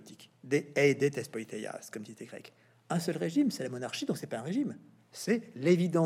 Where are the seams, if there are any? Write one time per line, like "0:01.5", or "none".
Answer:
none